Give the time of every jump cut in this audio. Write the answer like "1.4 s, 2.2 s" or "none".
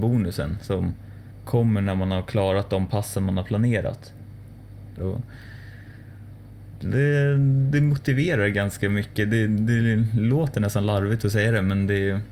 5.0 s